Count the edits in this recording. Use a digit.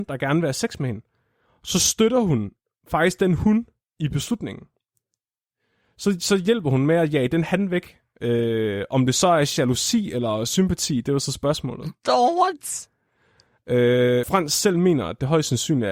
1